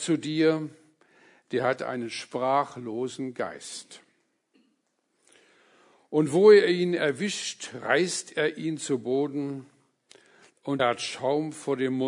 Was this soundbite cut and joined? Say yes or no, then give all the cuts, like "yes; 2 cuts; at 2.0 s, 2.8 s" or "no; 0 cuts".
yes; 1 cut; at 10.8 s